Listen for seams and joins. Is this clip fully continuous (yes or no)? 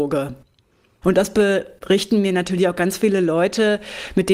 no